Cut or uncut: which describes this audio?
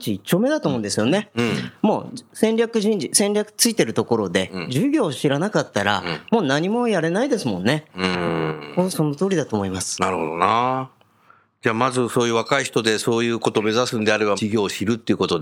uncut